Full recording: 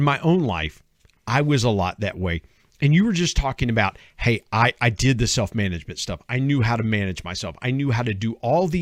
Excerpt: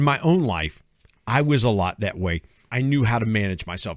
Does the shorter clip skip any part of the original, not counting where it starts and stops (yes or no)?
yes